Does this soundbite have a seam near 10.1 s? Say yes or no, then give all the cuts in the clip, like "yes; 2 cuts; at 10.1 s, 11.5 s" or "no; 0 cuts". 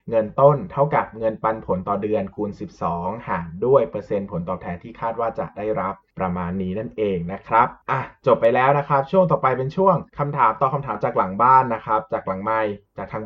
yes; 1 cut; at 10.1 s